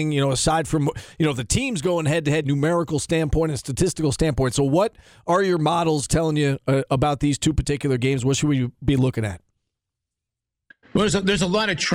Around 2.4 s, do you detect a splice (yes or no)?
yes